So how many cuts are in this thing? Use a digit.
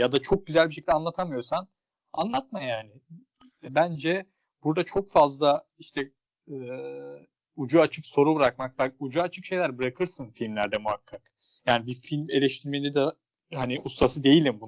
1